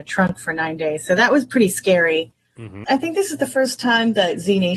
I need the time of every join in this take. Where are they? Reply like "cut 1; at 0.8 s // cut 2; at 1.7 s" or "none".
cut 1; at 2.8 s